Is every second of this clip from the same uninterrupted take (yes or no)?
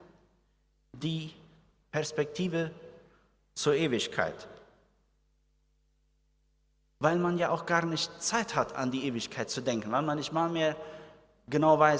yes